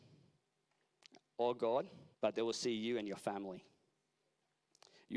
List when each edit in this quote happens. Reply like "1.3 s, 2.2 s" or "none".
2.1 s